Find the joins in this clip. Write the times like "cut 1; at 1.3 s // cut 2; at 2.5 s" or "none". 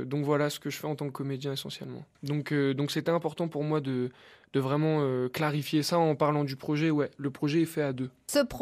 cut 1; at 2.2 s